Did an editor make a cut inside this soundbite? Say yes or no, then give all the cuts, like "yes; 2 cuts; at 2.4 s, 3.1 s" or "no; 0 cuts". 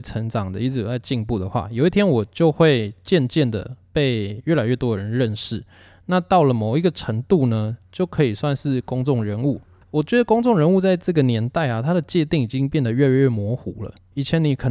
no; 0 cuts